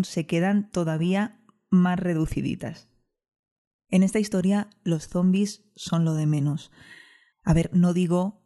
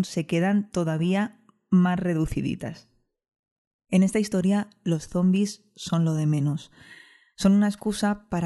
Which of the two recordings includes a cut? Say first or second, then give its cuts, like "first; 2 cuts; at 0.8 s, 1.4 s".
first; 1 cut; at 7.3 s